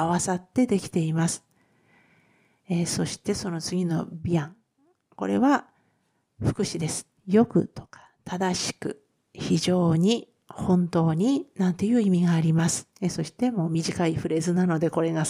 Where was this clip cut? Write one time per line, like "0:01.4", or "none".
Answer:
0:07.2
0:12.9